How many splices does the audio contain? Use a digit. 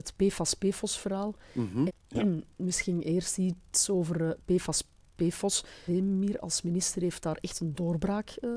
2